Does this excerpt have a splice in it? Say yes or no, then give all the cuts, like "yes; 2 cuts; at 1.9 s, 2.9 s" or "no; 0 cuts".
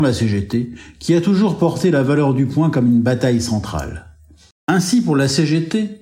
yes; 1 cut; at 4.5 s